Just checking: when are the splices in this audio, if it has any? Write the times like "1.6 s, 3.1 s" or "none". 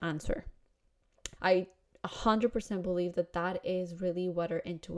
1.4 s